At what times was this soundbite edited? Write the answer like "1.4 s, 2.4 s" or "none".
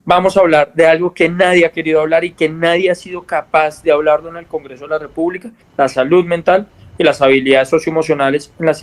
5.6 s